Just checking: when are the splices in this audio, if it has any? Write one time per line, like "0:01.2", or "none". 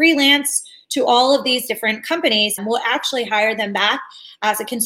0:02.6